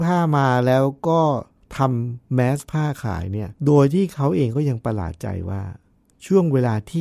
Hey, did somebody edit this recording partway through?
yes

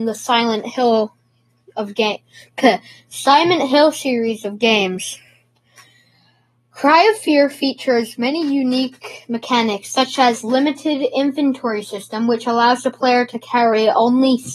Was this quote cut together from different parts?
no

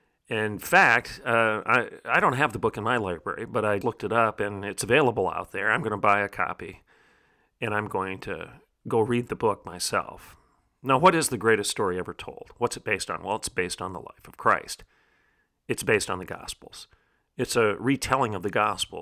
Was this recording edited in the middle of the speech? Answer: yes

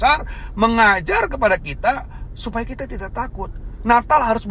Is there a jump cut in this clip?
no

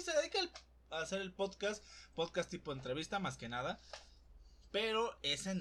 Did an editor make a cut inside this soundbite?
no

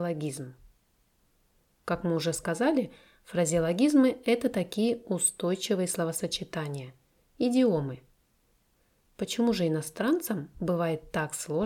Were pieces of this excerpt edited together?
no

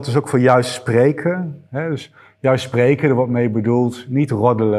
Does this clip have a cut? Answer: no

